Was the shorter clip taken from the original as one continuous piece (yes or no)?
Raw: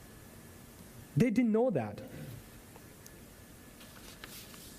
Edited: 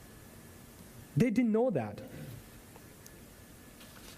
yes